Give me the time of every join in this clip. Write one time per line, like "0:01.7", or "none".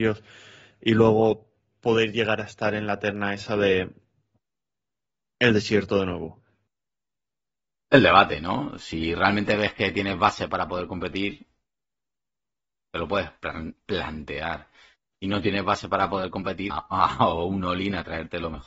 0:15.1
0:16.7